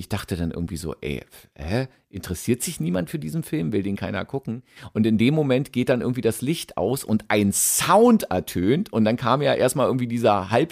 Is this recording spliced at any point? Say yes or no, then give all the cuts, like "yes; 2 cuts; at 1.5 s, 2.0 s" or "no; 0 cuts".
no; 0 cuts